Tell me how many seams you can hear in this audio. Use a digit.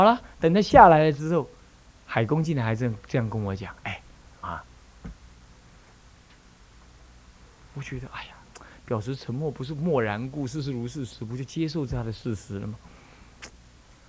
1